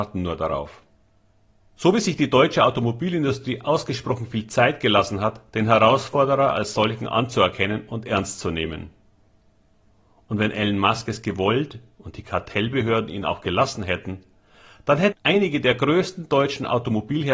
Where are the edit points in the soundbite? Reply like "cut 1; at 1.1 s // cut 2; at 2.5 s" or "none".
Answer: cut 1; at 15.1 s